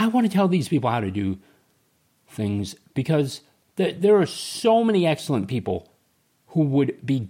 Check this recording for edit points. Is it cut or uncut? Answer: uncut